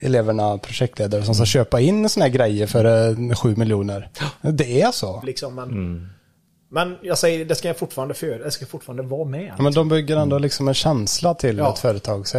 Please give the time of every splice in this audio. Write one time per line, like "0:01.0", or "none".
0:05.2